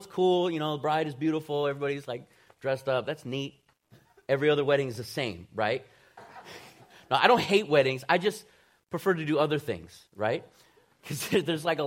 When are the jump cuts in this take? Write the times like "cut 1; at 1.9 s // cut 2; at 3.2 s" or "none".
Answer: cut 1; at 6.2 s